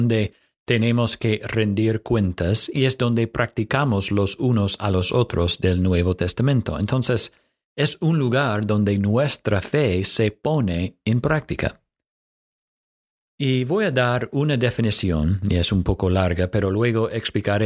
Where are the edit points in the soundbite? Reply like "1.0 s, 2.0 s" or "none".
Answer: none